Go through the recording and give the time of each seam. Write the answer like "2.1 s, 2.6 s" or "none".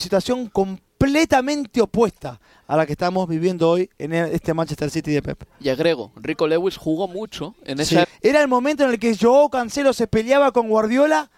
8.0 s